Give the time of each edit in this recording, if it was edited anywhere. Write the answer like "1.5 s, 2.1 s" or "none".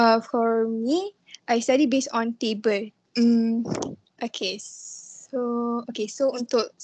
3.1 s